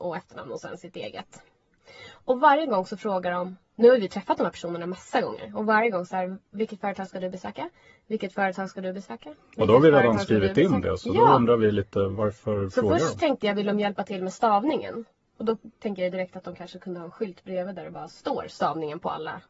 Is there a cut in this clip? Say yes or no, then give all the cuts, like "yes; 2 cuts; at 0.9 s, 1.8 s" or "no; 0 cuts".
no; 0 cuts